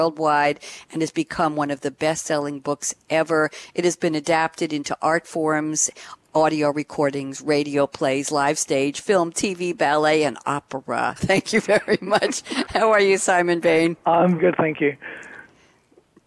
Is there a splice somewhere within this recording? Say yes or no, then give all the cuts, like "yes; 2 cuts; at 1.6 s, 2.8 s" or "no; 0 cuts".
yes; 2 cuts; at 11.2 s, 14.4 s